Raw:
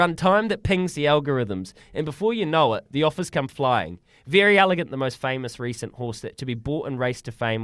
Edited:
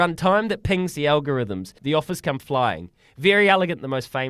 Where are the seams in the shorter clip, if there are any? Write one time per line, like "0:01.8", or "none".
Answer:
0:01.8